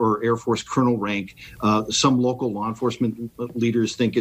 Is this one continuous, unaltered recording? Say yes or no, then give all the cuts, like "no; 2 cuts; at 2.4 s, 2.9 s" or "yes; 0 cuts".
yes; 0 cuts